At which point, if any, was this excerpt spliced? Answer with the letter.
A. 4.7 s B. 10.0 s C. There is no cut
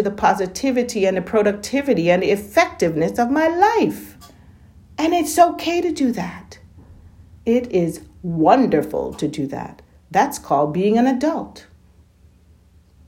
C